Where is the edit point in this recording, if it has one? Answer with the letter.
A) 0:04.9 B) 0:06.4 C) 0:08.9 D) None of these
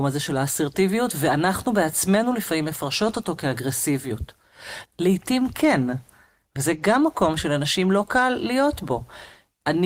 A